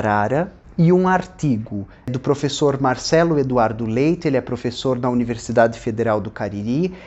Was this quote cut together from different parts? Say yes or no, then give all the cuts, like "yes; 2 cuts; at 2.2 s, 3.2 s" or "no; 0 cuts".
no; 0 cuts